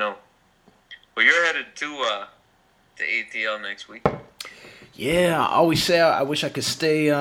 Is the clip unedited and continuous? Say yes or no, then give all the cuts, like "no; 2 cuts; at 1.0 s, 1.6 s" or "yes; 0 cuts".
yes; 0 cuts